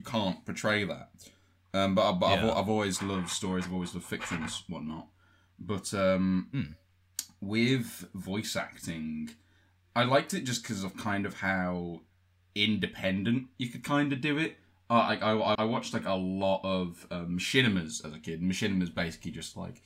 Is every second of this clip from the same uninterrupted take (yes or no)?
no